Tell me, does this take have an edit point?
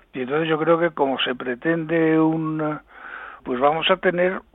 yes; 1 cut; at 3.4 s

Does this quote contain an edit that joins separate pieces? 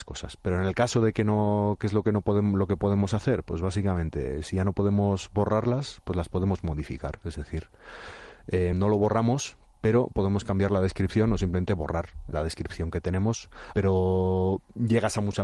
yes; 3 cuts; at 8.7 s, 12.3 s, 13.7 s

